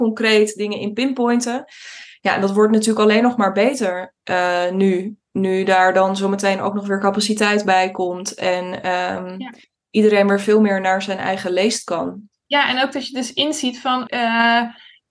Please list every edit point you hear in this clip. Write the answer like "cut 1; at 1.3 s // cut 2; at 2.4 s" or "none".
cut 1; at 12.3 s // cut 2; at 14.1 s